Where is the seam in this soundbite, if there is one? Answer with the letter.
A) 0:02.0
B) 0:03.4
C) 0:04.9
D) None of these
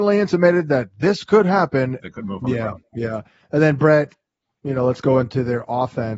A